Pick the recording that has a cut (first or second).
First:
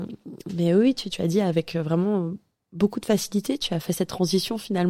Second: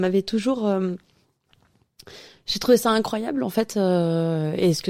first